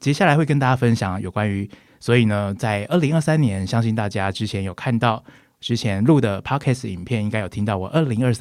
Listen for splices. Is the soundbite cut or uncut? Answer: cut